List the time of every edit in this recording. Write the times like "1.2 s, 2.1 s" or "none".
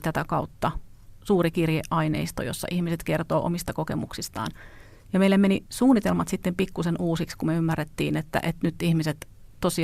none